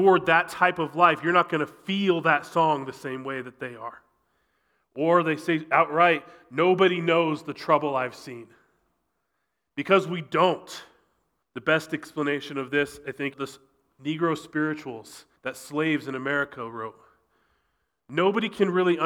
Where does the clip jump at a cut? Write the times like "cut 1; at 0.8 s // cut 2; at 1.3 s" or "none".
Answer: cut 1; at 11.4 s // cut 2; at 13.3 s // cut 3; at 15.4 s